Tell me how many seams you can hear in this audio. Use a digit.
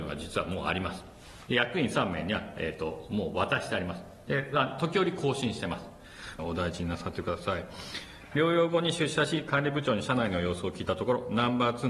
1